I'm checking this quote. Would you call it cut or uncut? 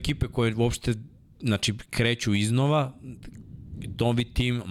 uncut